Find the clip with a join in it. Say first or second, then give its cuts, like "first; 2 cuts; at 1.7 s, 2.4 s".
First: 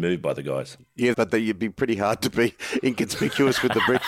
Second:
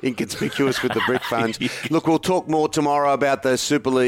first; 1 cut; at 1.1 s